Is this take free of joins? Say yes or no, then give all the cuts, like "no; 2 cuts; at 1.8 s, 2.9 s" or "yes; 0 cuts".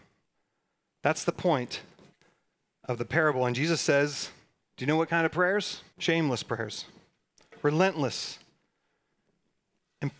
no; 1 cut; at 5.9 s